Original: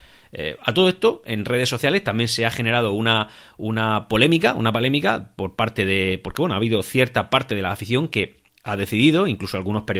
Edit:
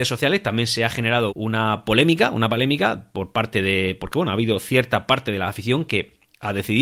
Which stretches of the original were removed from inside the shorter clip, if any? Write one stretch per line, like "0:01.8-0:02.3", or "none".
0:02.9-0:03.5